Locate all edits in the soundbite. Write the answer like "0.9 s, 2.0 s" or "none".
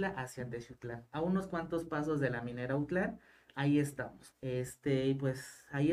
4.3 s